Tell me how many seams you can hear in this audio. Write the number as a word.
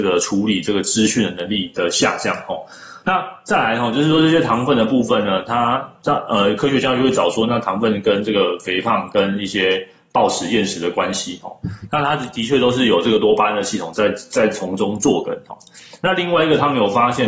one